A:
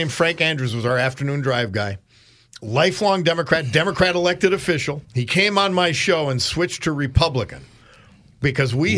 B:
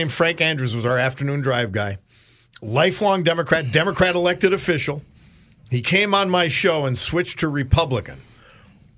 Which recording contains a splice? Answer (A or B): A